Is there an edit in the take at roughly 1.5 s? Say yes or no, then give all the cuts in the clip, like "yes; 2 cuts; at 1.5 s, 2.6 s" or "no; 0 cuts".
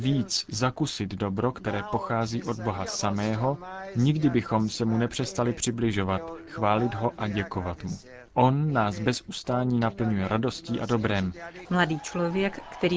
no; 2 cuts; at 8.3 s, 11.6 s